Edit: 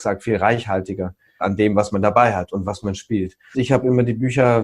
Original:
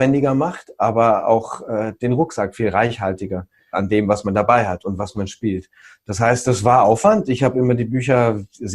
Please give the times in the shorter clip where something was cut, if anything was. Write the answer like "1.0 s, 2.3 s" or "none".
3.5 s